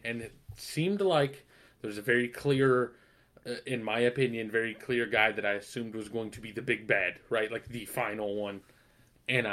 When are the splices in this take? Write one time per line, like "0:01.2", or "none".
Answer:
none